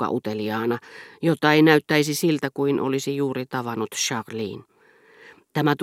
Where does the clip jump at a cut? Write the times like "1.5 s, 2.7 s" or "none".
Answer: none